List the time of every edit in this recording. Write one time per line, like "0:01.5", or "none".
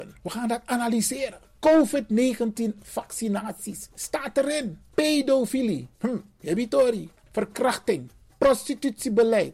0:07.2